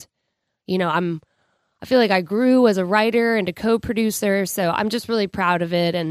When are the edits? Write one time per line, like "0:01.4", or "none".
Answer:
none

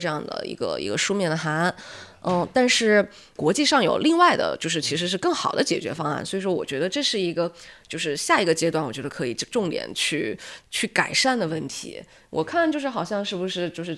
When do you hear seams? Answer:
none

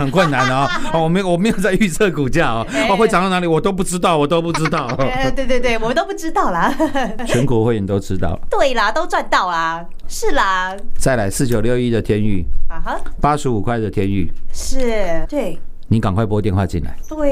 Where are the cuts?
0:10.0
0:15.2

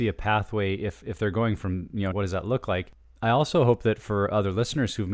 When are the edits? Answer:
0:02.1

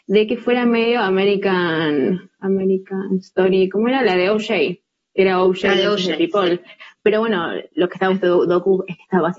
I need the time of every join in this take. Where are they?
0:06.9
0:08.1

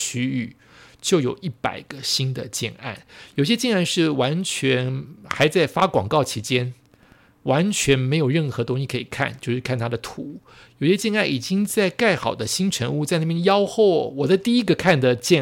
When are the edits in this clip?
none

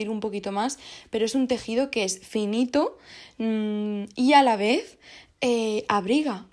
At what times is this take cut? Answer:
none

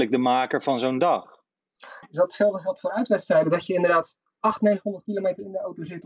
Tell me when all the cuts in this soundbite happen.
0:02.0

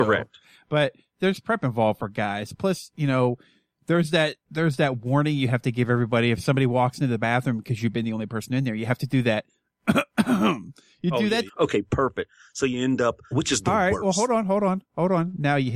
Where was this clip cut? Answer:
0:04.4
0:11.5
0:13.3

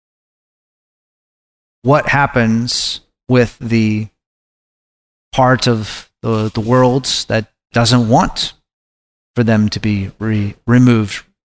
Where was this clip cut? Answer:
none

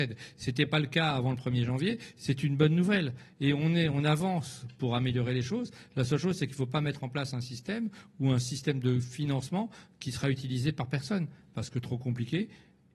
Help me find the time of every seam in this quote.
none

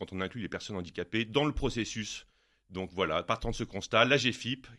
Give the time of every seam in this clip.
none

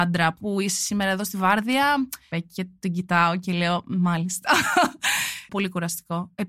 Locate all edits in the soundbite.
0:02.3
0:05.5

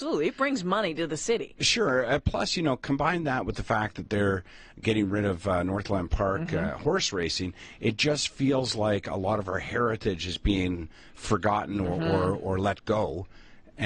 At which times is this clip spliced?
none

